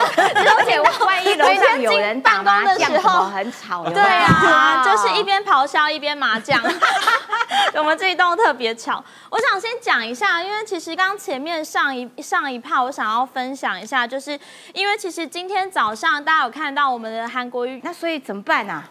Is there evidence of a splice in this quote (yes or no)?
yes